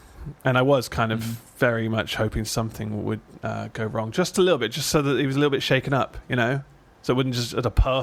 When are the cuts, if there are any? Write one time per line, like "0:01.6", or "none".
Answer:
0:04.3